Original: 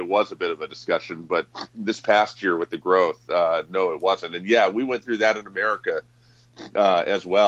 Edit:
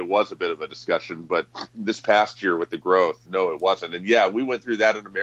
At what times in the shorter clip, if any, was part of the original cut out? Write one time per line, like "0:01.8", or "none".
0:03.3